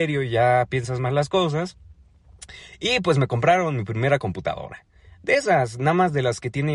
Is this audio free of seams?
yes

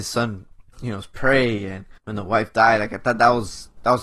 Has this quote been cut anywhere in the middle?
yes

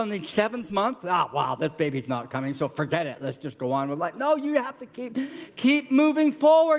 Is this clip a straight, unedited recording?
yes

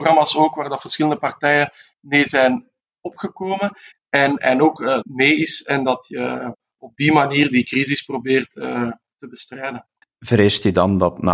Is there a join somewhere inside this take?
yes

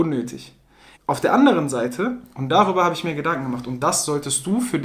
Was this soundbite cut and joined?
yes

